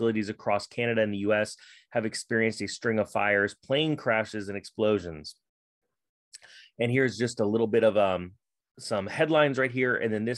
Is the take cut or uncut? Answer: uncut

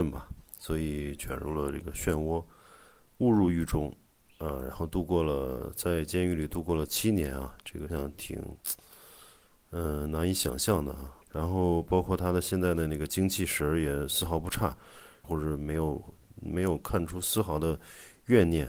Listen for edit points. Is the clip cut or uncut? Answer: cut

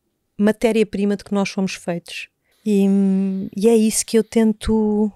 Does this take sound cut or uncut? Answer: cut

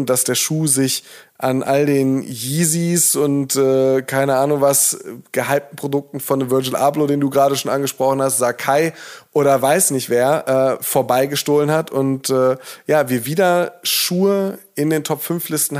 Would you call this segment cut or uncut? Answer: uncut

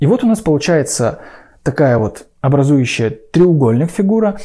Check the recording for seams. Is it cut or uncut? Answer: uncut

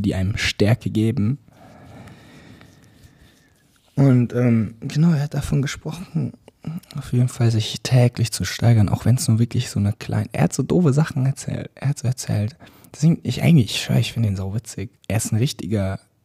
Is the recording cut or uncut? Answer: cut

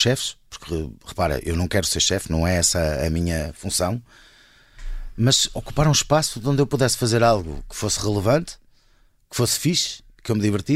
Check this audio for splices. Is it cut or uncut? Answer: uncut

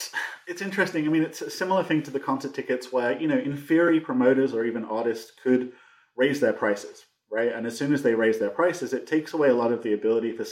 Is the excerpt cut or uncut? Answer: uncut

